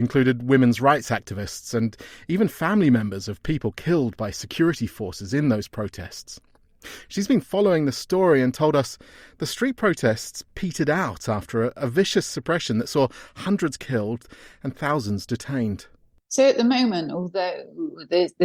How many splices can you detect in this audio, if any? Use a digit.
1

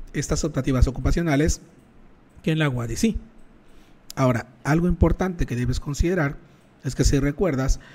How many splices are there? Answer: 0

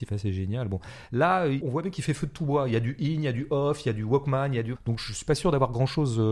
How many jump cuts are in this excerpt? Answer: 1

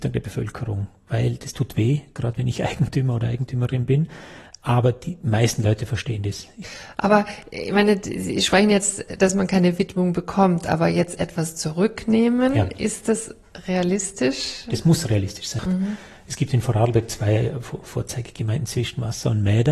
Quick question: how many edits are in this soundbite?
1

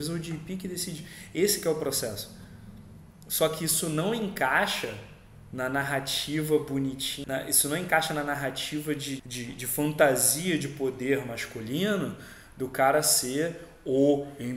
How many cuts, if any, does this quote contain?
2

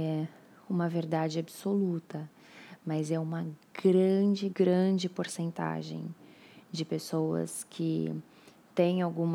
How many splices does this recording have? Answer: 1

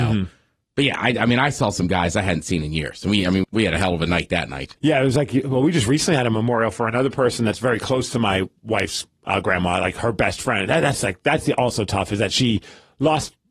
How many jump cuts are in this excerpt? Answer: 2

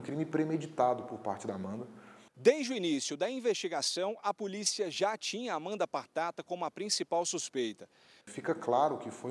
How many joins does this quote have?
2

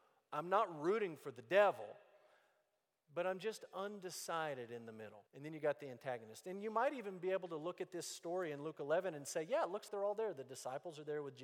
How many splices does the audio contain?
2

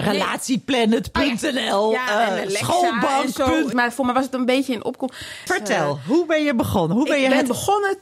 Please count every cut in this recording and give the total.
2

